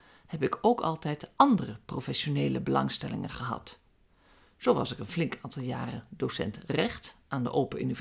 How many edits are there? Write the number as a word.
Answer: zero